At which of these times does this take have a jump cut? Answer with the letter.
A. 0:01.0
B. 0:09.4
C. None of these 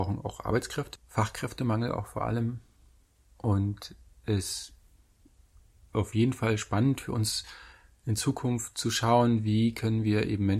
A